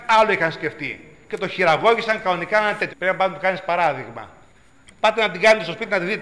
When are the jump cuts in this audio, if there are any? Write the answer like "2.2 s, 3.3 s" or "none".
2.9 s, 4.9 s